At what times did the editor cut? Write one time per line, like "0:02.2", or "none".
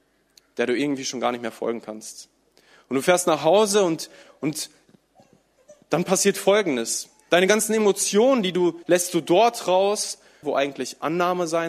0:08.8
0:10.4